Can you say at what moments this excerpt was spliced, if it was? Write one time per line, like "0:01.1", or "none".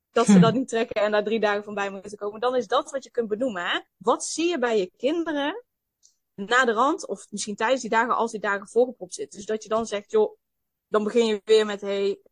0:03.9
0:06.4

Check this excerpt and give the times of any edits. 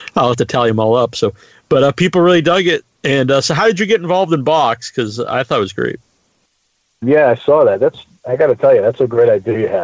0:07.0

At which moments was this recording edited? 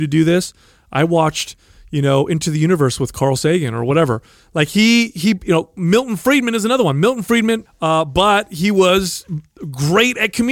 0:07.7

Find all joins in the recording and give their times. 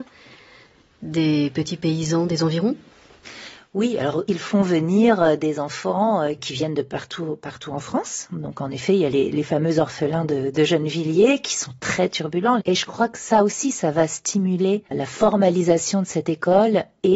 0:12.6
0:14.9

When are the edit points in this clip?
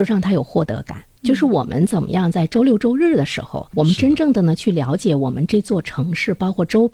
0:01.1

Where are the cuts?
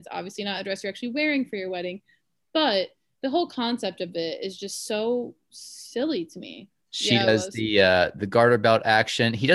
0:06.8

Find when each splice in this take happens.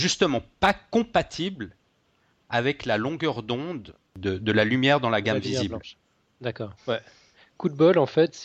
0:06.8

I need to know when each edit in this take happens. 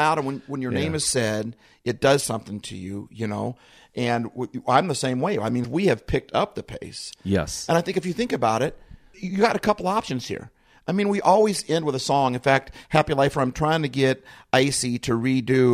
0:05.6

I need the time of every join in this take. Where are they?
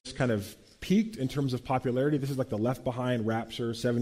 none

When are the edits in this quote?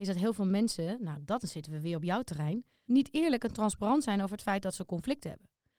0:02.8

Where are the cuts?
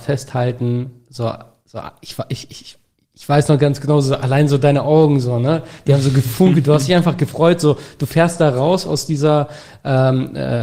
none

